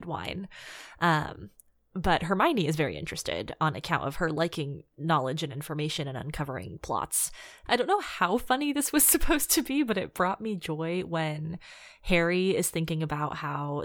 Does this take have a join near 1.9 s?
no; 1 cut; at 7.7 s

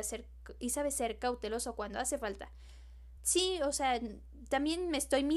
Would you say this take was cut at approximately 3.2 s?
yes; 1 cut; at 3.2 s

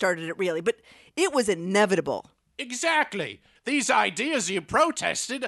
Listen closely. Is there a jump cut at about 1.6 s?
no; 1 cut; at 3.6 s

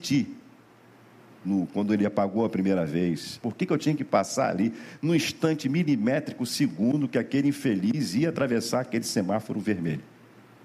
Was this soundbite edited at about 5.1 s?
no; 2 cuts; at 1.4 s, 3.4 s

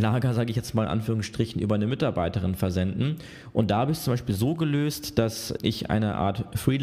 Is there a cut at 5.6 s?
yes; 1 cut; at 5.6 s

